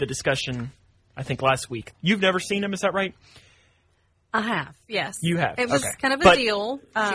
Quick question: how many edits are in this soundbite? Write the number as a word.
one